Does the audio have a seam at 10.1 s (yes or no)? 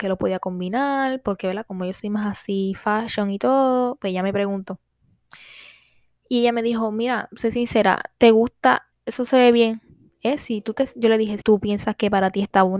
yes